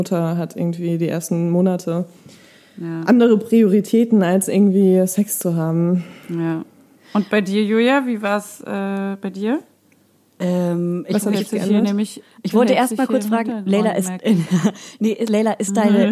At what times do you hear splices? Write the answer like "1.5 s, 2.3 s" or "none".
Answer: none